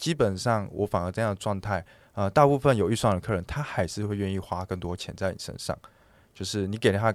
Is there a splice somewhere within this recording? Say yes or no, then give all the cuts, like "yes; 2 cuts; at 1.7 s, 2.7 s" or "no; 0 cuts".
no; 0 cuts